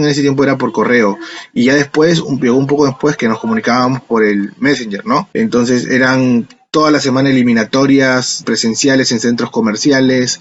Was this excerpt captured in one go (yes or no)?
no